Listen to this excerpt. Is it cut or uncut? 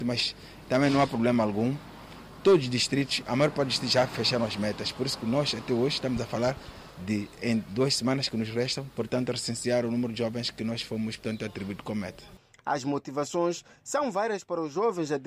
cut